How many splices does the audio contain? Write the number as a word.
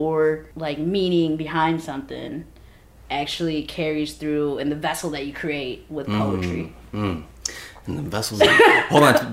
one